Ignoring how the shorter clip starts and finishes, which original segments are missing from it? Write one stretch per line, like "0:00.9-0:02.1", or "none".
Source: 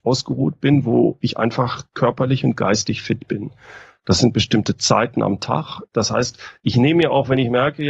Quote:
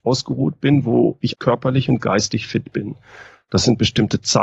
0:01.3-0:01.9